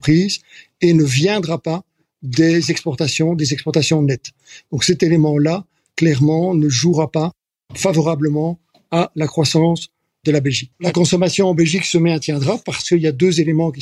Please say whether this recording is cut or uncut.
uncut